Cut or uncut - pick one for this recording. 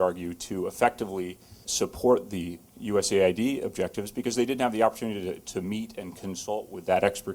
cut